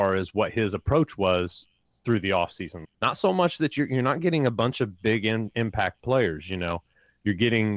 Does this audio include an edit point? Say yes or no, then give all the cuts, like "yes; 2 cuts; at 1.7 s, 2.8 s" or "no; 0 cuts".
yes; 1 cut; at 2.8 s